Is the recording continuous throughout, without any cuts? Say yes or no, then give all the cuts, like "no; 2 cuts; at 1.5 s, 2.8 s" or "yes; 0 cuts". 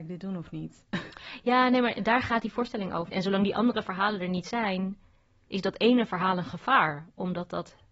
no; 1 cut; at 3.1 s